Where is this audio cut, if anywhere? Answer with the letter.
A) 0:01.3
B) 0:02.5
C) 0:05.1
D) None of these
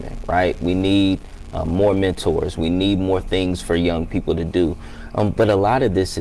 B